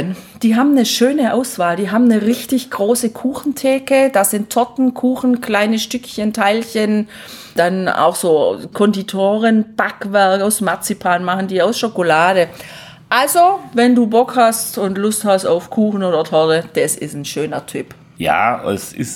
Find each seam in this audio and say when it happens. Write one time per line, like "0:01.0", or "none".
none